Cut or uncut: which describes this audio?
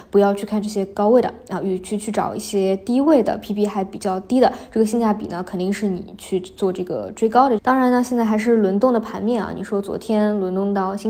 cut